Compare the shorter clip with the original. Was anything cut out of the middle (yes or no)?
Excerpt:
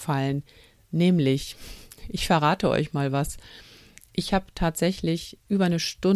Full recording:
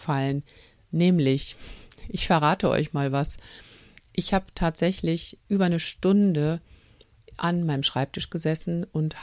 no